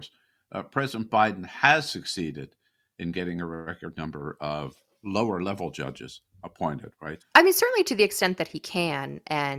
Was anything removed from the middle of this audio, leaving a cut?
yes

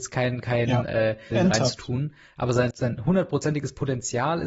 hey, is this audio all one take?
no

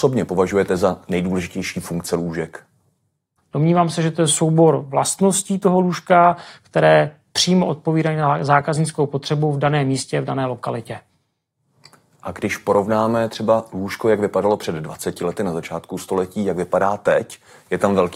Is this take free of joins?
no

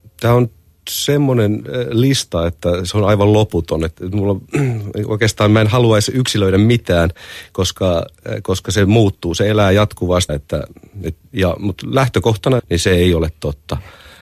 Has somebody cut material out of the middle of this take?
yes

